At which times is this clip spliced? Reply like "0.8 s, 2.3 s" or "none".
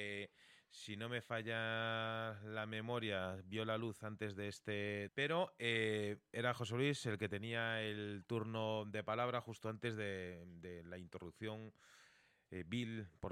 5.1 s